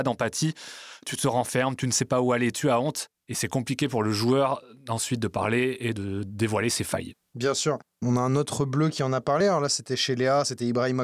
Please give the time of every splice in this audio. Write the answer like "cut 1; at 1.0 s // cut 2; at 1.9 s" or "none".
none